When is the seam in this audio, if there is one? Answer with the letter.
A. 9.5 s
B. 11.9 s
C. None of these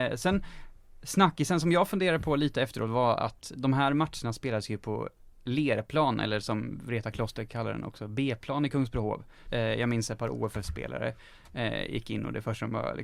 A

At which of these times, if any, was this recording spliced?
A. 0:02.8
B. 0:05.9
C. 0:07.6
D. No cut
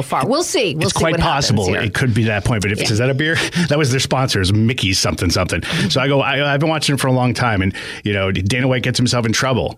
A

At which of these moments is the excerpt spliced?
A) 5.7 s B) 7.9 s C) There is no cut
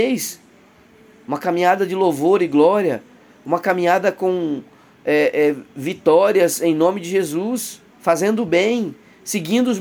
B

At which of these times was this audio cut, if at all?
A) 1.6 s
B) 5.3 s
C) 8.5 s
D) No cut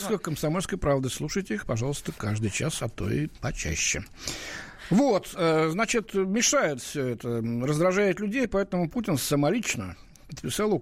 D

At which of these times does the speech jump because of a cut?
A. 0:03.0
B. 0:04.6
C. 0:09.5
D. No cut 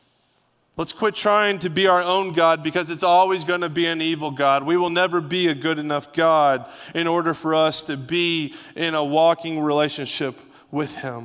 D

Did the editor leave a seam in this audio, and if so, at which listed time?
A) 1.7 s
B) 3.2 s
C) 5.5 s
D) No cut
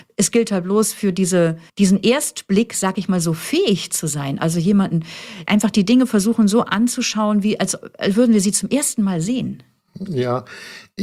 A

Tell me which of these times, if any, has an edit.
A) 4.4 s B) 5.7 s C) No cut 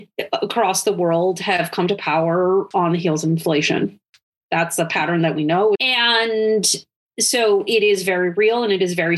B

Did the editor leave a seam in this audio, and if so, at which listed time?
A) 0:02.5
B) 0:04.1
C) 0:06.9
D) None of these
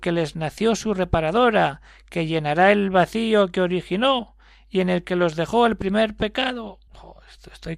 C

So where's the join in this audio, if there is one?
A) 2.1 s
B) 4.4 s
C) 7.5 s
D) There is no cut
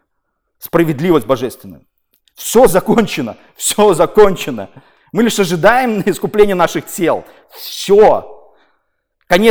D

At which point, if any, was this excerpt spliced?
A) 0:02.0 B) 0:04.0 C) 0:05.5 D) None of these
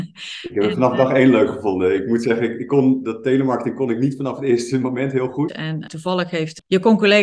C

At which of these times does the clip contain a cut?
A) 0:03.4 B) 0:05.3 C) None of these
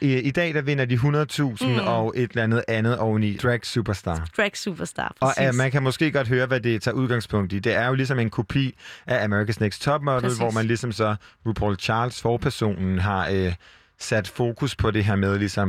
A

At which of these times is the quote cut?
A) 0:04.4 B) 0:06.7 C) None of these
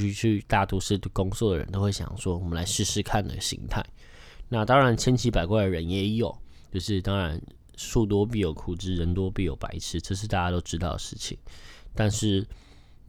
A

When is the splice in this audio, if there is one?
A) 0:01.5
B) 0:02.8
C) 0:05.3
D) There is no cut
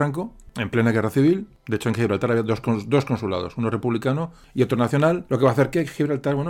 D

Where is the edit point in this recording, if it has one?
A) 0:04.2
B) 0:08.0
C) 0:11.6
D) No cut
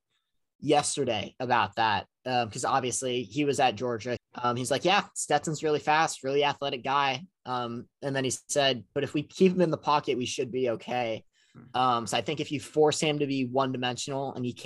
A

